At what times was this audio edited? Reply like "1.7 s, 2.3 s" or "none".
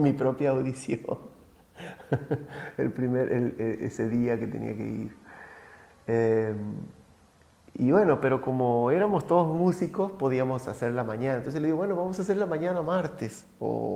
none